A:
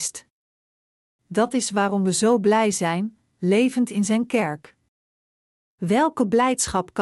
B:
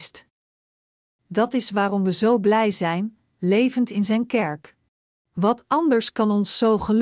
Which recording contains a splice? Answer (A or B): B